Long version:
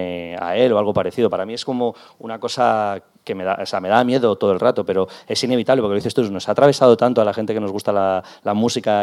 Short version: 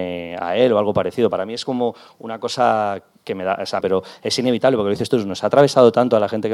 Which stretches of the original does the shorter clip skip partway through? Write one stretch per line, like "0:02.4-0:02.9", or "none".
0:03.8-0:04.9